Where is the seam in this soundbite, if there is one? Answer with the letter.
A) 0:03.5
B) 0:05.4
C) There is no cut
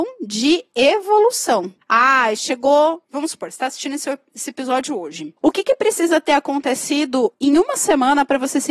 C